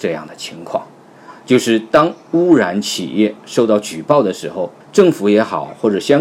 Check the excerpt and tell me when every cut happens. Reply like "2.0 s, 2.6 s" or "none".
4.8 s